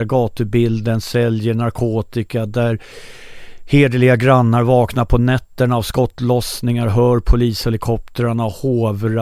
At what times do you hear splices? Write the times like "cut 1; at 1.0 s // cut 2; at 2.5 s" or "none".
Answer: none

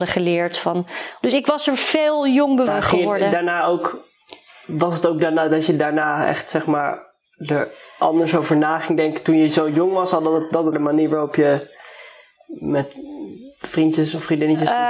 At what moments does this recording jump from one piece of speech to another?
cut 1; at 2.7 s // cut 2; at 10.7 s

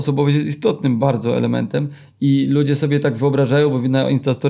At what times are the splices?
none

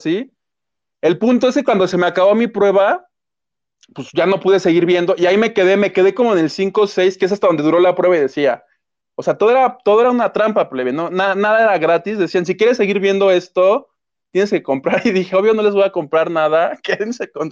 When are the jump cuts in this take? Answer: none

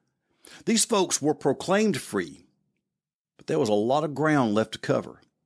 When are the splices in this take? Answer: none

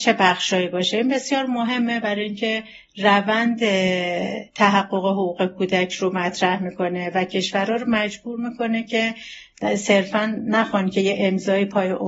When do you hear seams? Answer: cut 1; at 4.5 s

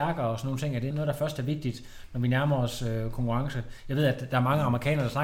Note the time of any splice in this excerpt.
cut 1; at 0.9 s

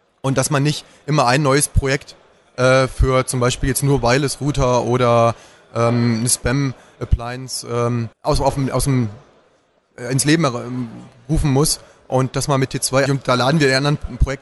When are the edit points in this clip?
cut 1; at 8.1 s // cut 2; at 13.1 s

